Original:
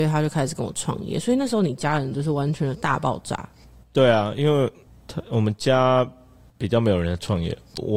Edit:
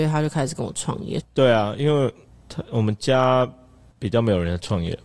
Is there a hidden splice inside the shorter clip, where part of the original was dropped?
yes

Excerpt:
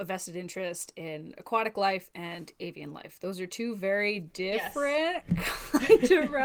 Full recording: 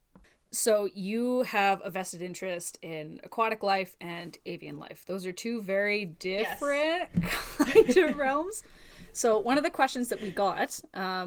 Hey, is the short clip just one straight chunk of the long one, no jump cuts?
yes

